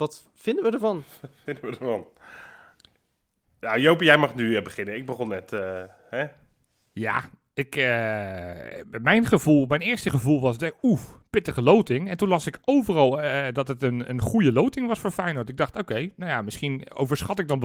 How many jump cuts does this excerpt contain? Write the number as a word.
zero